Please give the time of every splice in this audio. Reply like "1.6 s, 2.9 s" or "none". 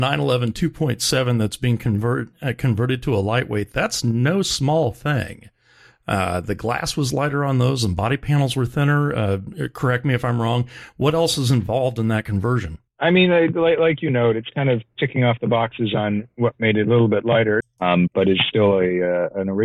12.9 s, 17.6 s

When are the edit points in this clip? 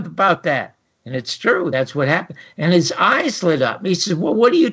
none

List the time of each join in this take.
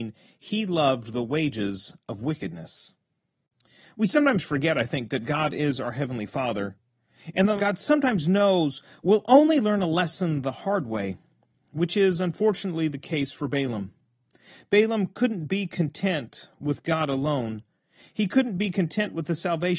7.6 s

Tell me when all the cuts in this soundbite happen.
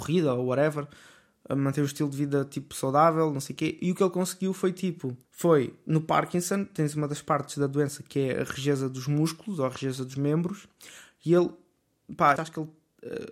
5.2 s, 12.4 s

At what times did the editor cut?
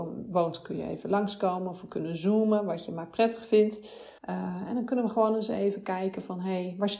4.2 s

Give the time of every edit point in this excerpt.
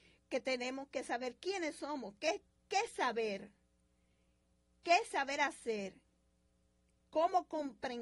none

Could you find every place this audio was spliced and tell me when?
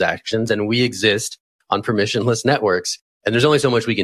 none

